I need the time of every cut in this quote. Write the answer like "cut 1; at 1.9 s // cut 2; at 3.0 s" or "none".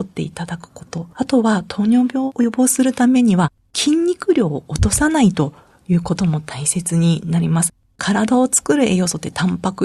none

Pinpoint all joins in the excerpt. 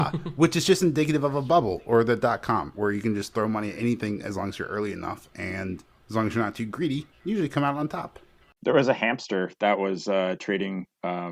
none

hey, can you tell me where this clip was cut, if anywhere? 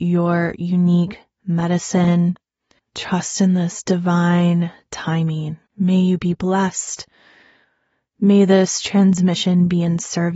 cut 1; at 2.8 s // cut 2; at 5.7 s

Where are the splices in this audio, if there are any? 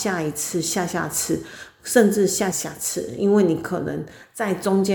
cut 1; at 2.5 s

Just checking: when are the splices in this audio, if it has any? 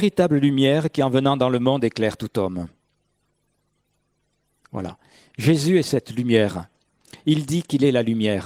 cut 1; at 7.2 s

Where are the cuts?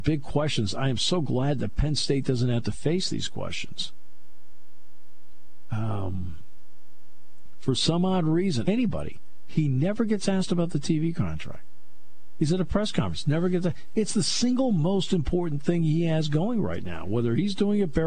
cut 1; at 8.7 s

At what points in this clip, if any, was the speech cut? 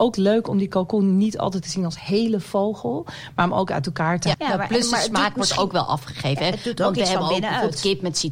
cut 1; at 4.3 s

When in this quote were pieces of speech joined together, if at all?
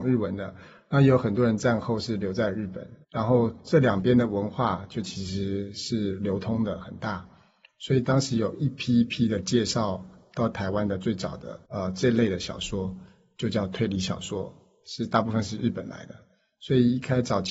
cut 1; at 3.0 s // cut 2; at 11.6 s

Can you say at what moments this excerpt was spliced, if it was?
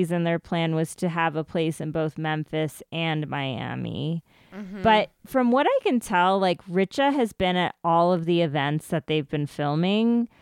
none

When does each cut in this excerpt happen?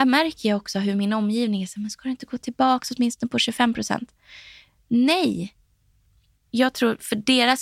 none

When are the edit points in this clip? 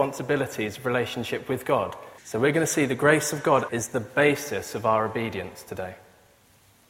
cut 1; at 2.2 s // cut 2; at 3.7 s

